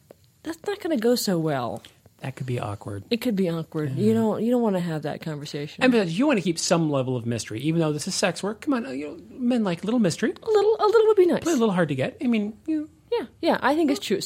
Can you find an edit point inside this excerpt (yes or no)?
no